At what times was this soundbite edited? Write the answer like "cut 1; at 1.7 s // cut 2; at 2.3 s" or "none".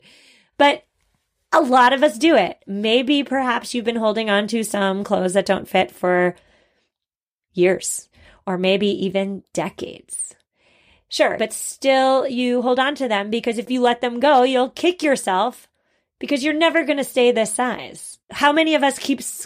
cut 1; at 11.4 s // cut 2; at 18.2 s